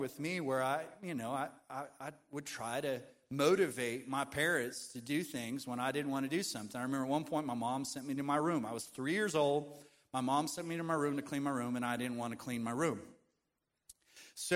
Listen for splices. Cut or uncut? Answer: uncut